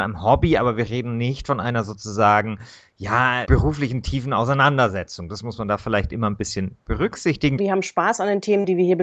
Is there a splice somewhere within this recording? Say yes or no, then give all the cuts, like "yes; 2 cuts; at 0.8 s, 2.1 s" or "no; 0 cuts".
yes; 2 cuts; at 3.4 s, 7.6 s